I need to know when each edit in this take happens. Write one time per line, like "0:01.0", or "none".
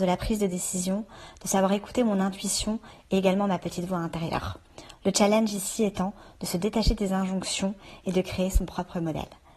none

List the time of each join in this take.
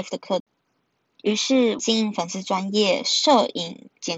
0:01.8

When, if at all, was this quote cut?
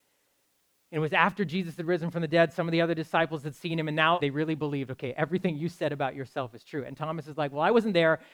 0:04.2

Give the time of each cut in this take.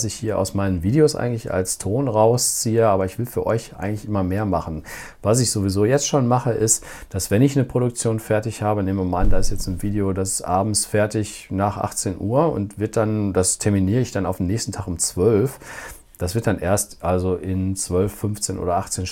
none

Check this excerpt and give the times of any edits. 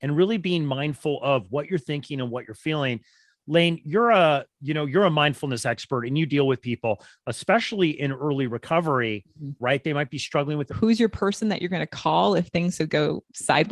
0:09.6
0:10.7

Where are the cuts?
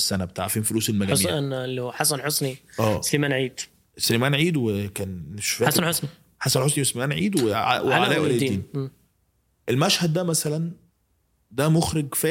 none

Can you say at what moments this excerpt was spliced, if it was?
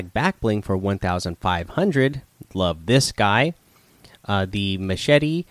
none

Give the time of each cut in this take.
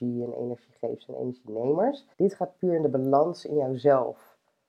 0:02.1

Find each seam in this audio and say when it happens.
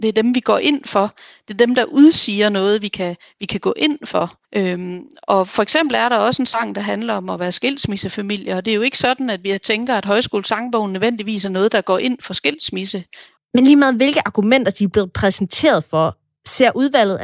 0:04.4
0:13.4

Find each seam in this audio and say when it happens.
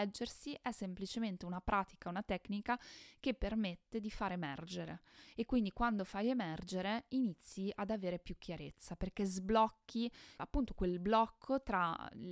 none

